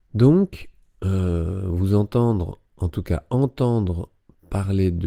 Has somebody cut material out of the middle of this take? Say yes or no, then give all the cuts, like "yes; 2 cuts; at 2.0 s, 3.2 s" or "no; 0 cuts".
no; 0 cuts